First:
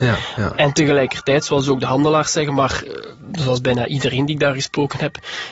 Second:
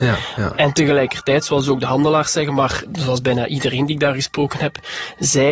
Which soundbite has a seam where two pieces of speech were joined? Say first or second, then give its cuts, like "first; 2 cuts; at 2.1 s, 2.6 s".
second; 1 cut; at 2.9 s